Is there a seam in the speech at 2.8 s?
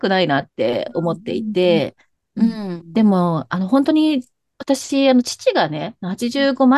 yes; 1 cut; at 2.8 s

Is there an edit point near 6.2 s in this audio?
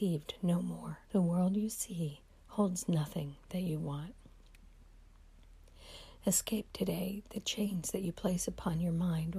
no; 1 cut; at 1.0 s

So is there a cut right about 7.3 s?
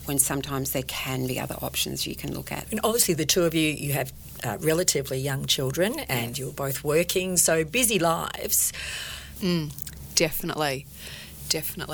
no; 2 cuts; at 2.6 s, 9.4 s

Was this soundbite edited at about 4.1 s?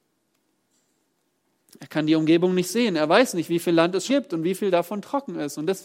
yes; 1 cut; at 4.1 s

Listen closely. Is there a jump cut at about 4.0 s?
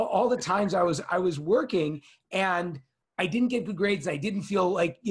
no; 0 cuts

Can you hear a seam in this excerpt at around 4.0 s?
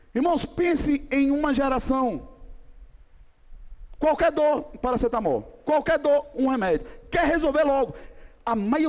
yes; 1 cut; at 4.0 s

